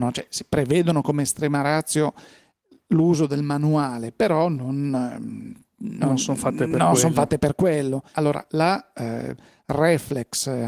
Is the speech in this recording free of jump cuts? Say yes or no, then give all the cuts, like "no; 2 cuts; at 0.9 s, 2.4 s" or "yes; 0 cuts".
no; 1 cut; at 8.1 s